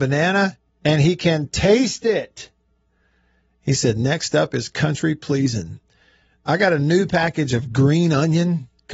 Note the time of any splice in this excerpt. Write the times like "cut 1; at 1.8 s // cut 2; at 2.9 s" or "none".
none